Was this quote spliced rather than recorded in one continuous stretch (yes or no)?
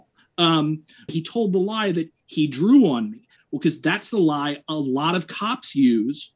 yes